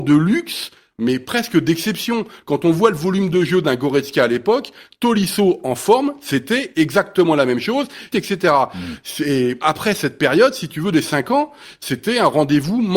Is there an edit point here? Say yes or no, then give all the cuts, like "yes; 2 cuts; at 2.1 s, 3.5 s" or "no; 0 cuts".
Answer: yes; 2 cuts; at 8.1 s, 9.6 s